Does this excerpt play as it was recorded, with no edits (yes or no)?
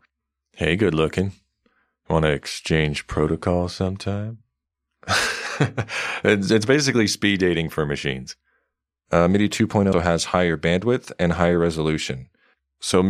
no